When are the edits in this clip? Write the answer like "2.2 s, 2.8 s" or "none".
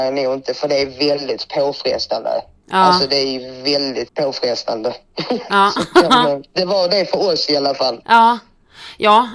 4.1 s